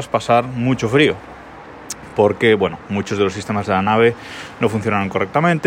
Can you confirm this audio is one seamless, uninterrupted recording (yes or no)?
yes